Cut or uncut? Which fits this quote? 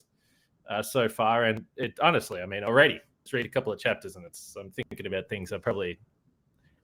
cut